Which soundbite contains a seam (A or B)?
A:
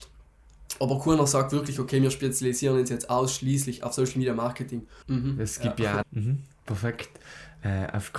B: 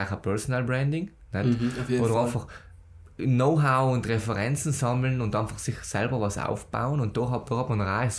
A